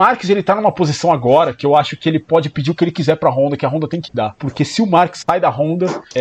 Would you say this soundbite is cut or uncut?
uncut